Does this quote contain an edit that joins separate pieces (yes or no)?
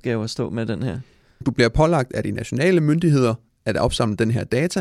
yes